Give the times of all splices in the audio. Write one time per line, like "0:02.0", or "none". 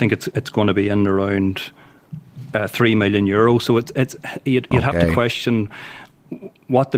none